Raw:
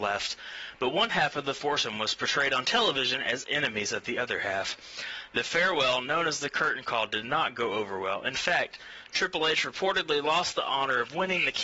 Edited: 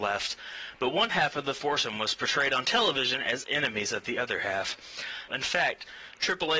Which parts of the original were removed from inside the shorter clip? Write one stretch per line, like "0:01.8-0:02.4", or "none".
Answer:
0:05.3-0:08.2

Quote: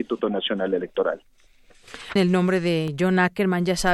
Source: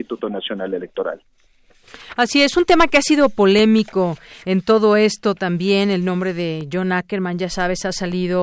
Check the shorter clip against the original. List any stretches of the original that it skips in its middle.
0:02.2-0:05.9

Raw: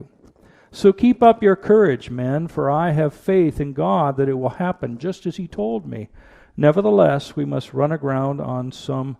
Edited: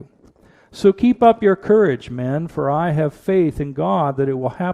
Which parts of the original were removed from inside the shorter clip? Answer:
none

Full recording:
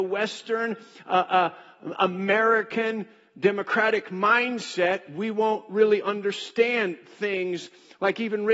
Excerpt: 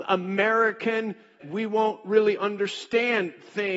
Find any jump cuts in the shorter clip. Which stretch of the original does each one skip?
0:03.3-0:05.1

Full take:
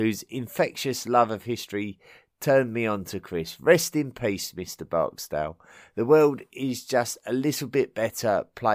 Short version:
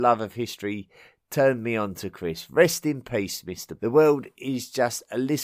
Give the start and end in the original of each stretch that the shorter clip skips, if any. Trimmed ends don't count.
0:04.9-0:05.9

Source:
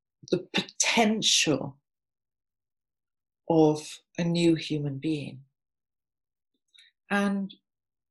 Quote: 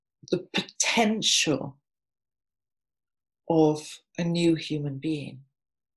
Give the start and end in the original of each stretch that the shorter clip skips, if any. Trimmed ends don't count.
none

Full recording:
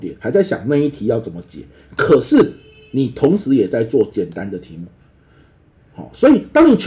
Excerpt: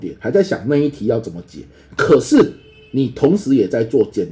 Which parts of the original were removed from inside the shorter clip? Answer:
none

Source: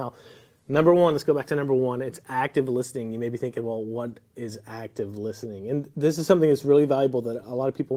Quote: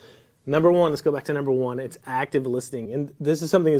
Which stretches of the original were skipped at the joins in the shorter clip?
0:03.1-0:05.6

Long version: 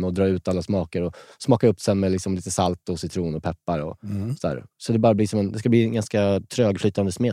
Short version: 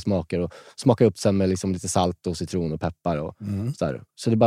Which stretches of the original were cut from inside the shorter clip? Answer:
none

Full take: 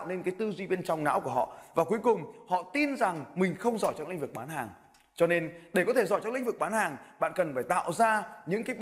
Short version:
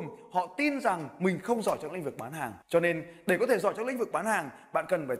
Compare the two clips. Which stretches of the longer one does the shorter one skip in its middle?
0:04.8-0:05.1

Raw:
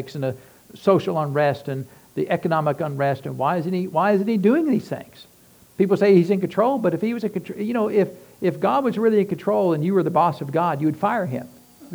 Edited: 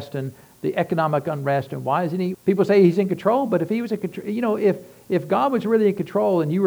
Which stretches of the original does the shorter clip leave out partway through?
0:03.9-0:05.7

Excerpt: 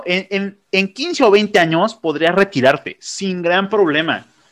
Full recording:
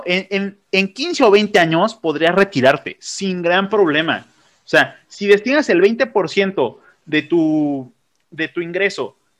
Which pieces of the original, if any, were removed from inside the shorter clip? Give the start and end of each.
none

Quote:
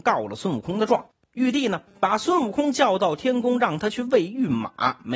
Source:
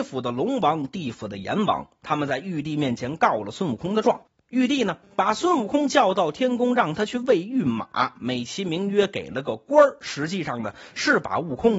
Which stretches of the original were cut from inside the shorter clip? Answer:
none

